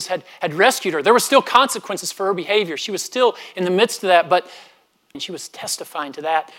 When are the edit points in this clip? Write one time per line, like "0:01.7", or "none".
0:05.1